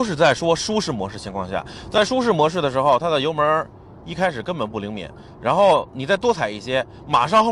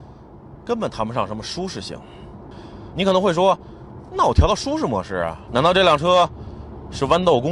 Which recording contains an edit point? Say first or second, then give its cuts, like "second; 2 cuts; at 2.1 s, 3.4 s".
second; 2 cuts; at 2.9 s, 5.5 s